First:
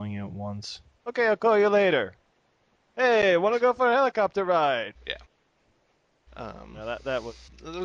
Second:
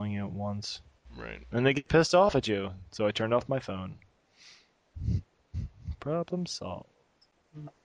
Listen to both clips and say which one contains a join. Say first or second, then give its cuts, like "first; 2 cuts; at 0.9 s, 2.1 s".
first; 1 cut; at 1.0 s